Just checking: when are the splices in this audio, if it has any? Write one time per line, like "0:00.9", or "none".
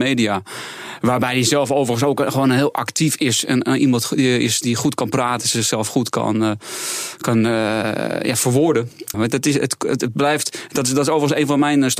0:09.1